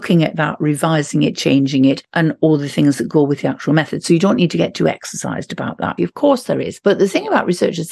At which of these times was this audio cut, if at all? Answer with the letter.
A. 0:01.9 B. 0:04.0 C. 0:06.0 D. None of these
C